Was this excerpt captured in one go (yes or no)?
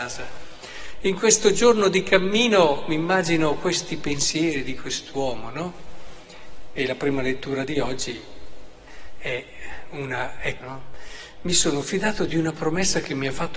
no